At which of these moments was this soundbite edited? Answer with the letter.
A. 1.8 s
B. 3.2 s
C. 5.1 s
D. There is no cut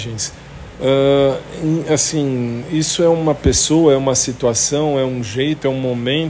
D